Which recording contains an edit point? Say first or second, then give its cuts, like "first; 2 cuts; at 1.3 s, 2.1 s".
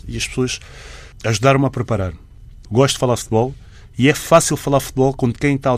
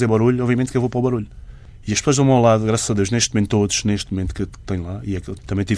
first; 1 cut; at 2.6 s